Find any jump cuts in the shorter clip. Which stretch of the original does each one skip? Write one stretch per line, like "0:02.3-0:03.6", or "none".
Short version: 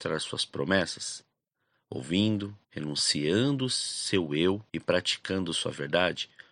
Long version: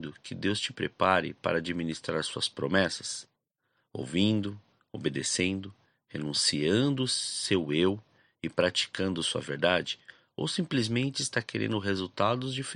0:04.7-0:06.0
0:08.1-0:08.4